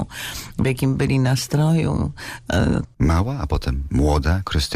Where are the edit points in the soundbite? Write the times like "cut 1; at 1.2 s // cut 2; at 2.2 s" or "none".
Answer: cut 1; at 2.8 s